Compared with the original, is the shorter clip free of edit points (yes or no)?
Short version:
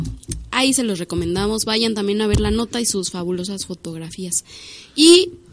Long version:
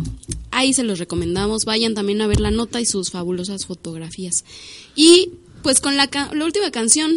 yes